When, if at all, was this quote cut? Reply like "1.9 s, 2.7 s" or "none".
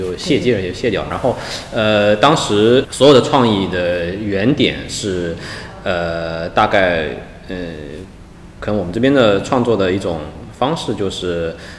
1.1 s